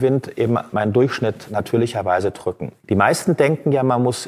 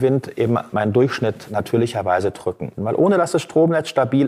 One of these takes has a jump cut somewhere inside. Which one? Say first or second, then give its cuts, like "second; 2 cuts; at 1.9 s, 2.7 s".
second; 1 cut; at 2.8 s